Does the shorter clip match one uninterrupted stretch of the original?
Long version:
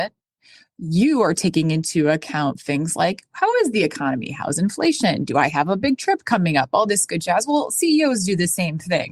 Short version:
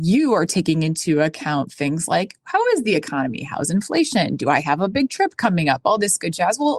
yes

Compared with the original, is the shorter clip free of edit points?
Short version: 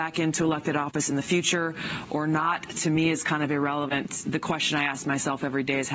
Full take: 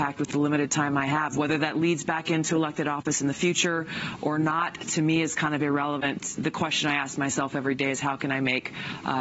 yes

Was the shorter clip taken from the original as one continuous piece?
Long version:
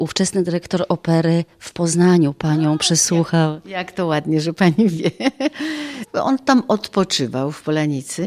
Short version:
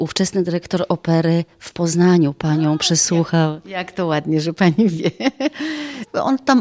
yes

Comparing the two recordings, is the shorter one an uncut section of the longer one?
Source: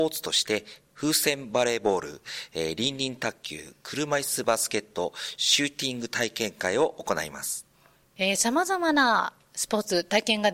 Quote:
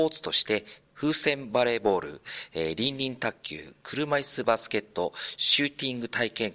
yes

